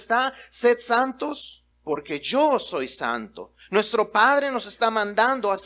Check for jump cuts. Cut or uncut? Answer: cut